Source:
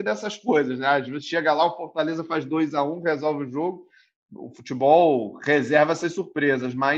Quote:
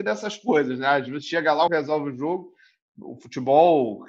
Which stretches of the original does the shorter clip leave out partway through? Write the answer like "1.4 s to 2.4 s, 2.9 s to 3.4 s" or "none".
1.7 s to 3.0 s